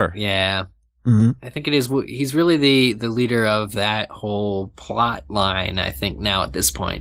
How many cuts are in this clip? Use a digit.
1